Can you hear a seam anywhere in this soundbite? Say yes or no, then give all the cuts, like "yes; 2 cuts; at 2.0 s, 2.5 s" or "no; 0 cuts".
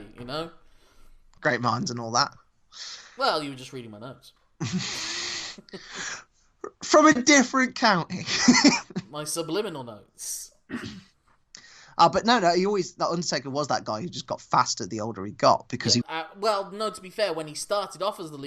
yes; 1 cut; at 16.0 s